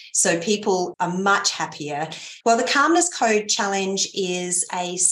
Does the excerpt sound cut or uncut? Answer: cut